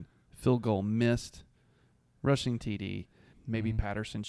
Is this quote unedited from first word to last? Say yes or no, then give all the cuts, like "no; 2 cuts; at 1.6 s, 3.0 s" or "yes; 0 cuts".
no; 1 cut; at 3.3 s